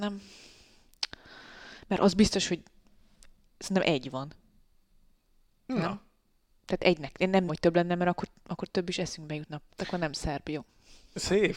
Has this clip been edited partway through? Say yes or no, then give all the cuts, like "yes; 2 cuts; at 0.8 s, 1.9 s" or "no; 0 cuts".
yes; 2 cuts; at 7.5 s, 9.7 s